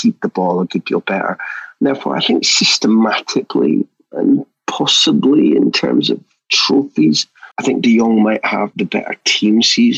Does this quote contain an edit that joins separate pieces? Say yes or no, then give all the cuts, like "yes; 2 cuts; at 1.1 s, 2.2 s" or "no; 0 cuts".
yes; 2 cuts; at 7.5 s, 8.7 s